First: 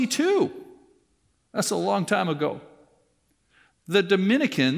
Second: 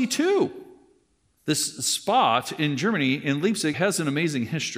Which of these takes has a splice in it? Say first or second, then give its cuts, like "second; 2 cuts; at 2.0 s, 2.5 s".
second; 2 cuts; at 1.4 s, 3.7 s